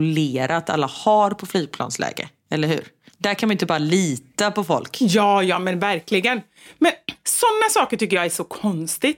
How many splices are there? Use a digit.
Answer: 0